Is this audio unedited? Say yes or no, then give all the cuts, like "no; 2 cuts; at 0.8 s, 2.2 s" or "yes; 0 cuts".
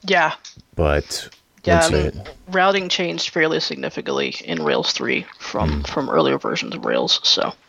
no; 1 cut; at 1.9 s